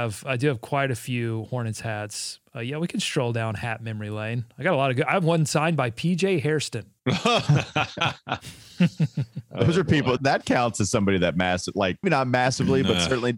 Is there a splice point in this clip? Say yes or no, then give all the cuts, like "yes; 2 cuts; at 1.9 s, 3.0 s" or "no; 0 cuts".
yes; 3 cuts; at 7.0 s, 10.2 s, 12.0 s